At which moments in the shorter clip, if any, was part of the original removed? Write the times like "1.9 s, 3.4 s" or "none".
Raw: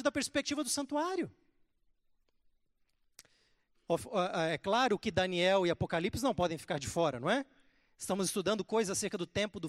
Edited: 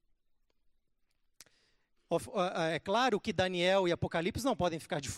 none